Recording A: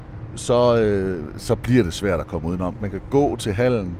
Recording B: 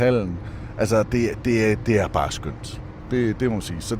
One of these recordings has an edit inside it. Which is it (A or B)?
A